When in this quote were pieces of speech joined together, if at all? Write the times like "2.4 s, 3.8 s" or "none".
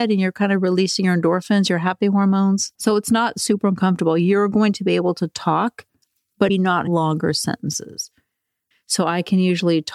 2.8 s, 6.5 s, 8.7 s